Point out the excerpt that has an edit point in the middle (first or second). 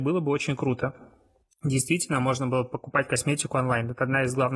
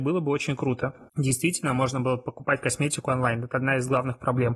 second